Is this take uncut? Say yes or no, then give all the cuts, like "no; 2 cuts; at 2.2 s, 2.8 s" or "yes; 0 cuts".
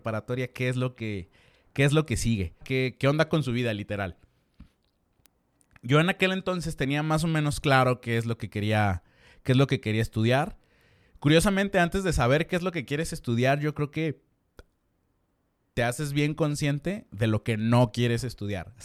no; 1 cut; at 2.6 s